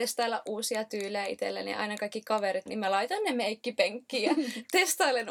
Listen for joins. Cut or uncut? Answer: cut